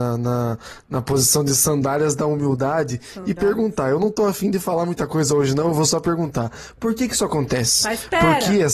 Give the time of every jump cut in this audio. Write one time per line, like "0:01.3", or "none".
none